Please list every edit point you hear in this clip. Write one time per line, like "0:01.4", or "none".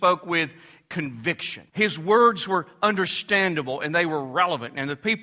0:01.7